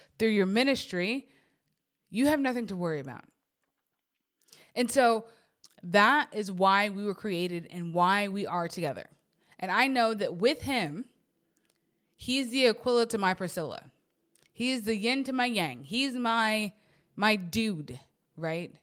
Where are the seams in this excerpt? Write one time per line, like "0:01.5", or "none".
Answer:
0:05.6